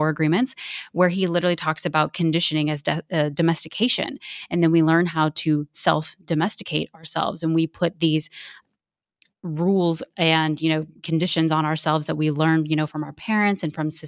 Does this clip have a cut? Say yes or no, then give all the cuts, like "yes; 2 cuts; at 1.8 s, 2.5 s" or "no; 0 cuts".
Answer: no; 0 cuts